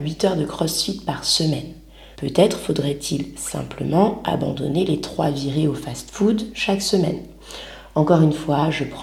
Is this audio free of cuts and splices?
no; 1 cut; at 2.1 s

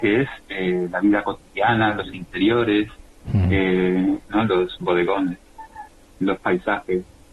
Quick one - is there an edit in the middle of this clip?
yes; 1 cut; at 4.2 s

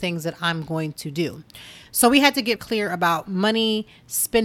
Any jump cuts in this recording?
yes; 1 cut; at 2.6 s

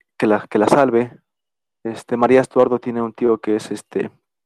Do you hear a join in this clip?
no; 0 cuts

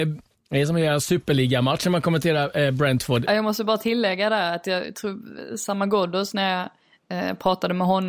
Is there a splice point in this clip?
yes; 1 cut; at 3.3 s

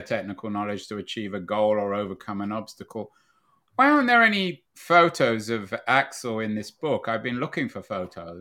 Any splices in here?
no; 0 cuts

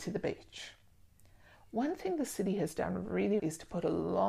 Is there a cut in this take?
yes; 1 cut; at 3.4 s

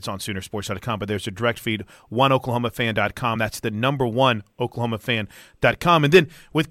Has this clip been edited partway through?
no; 0 cuts

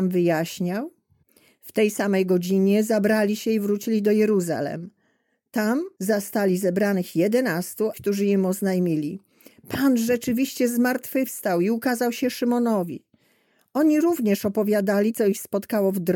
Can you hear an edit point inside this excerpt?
yes; 1 cut; at 7.9 s

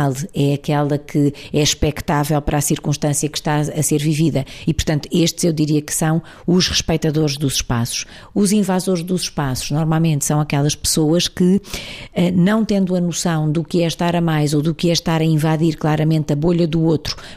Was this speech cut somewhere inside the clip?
no; 0 cuts

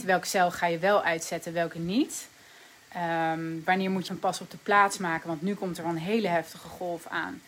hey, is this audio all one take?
no; 1 cut; at 4.1 s

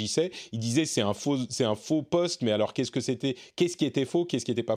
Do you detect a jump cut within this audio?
no; 0 cuts

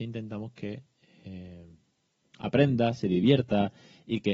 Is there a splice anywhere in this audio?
no; 0 cuts

